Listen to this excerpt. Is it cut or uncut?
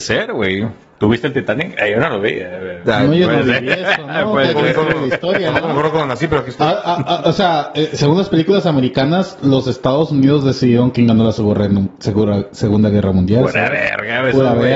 uncut